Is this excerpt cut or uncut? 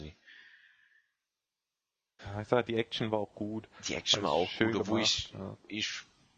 cut